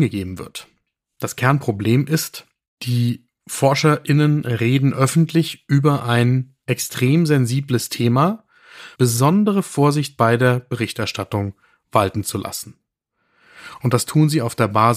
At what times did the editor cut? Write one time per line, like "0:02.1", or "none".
0:09.0